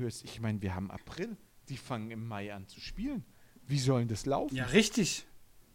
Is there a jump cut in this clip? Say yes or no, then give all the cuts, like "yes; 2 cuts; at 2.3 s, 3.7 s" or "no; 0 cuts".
no; 0 cuts